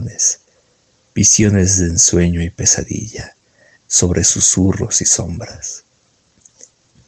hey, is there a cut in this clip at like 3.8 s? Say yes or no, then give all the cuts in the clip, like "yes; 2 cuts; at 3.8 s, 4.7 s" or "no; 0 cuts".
yes; 1 cut; at 3.8 s